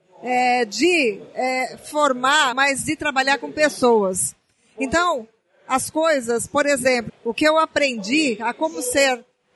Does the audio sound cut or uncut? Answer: cut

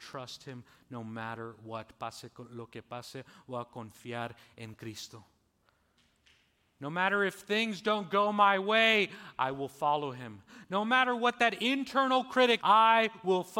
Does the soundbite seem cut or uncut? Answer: cut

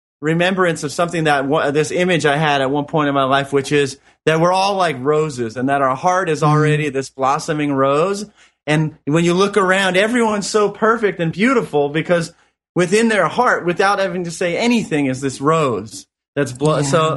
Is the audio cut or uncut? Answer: uncut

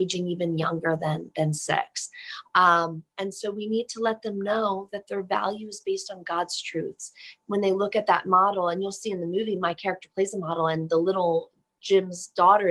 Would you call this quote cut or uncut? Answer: uncut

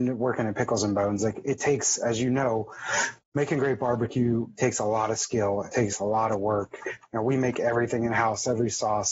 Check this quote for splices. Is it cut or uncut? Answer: uncut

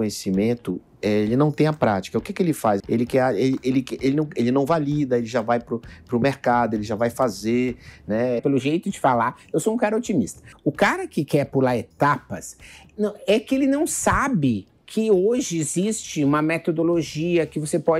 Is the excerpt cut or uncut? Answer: cut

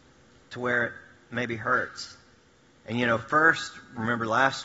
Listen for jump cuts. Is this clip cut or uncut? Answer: uncut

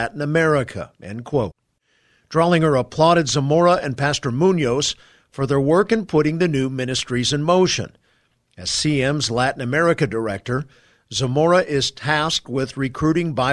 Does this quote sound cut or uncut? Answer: uncut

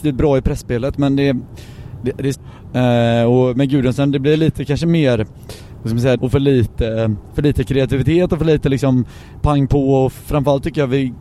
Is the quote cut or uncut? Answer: cut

